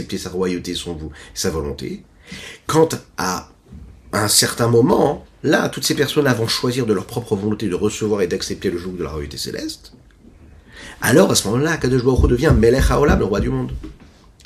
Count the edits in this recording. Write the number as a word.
zero